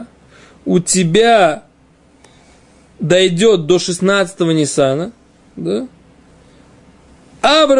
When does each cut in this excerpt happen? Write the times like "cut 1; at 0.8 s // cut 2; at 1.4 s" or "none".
none

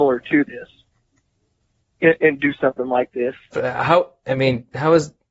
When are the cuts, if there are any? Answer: cut 1; at 3.5 s

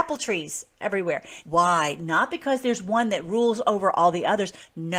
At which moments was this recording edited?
cut 1; at 1.4 s

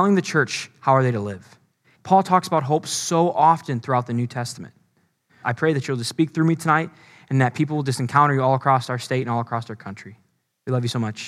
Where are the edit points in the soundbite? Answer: cut 1; at 2.0 s // cut 2; at 5.4 s

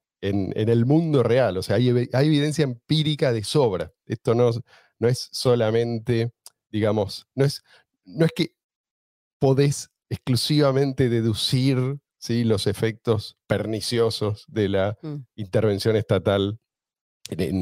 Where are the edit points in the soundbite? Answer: none

